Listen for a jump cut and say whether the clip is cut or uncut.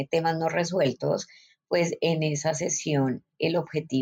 uncut